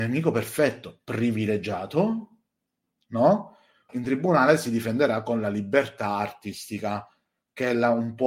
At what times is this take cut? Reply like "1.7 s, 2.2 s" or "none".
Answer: 3.9 s